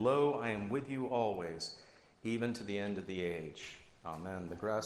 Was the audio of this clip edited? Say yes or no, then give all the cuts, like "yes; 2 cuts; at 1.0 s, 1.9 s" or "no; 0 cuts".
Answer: no; 0 cuts